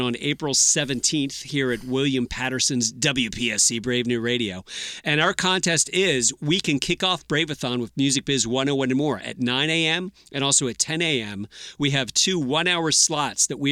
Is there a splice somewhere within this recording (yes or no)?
no